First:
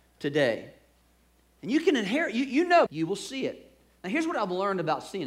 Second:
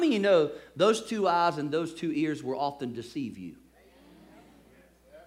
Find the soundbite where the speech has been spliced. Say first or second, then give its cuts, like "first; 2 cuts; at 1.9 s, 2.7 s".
first; 1 cut; at 2.9 s